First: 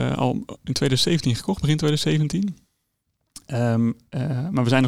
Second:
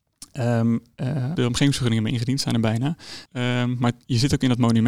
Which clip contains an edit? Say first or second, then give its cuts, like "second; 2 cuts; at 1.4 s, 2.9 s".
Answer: second; 2 cuts; at 1.3 s, 3.3 s